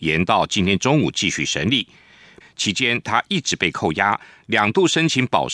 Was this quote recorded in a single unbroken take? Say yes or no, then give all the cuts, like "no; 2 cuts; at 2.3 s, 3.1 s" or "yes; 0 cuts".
no; 1 cut; at 2.4 s